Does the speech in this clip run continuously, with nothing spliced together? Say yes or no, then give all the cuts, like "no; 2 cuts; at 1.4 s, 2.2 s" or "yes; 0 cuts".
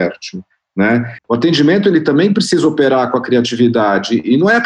no; 1 cut; at 1.2 s